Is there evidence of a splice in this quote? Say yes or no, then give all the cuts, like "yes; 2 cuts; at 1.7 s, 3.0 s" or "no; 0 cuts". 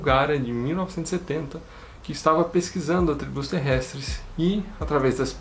no; 0 cuts